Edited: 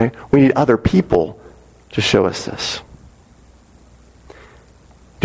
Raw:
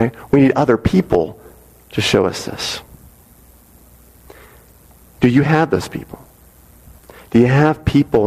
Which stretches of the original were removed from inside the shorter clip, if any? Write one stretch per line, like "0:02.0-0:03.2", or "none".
none